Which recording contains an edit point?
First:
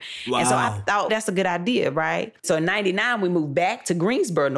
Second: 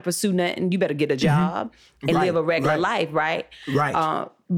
first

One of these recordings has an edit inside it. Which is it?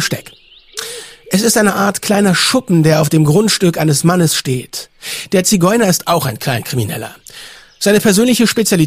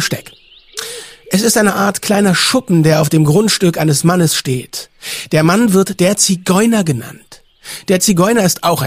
first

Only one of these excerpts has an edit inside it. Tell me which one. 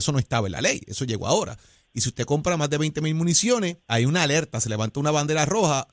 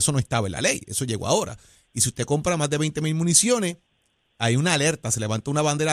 first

